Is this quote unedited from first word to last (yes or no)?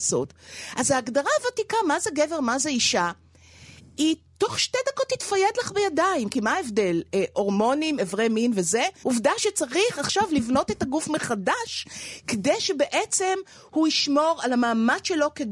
no